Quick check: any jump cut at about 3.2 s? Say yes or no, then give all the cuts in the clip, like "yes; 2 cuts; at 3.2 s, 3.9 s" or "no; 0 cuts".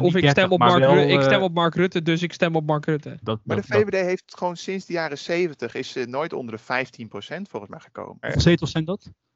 yes; 2 cuts; at 3.2 s, 8.2 s